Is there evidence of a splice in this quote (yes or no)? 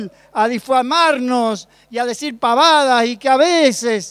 no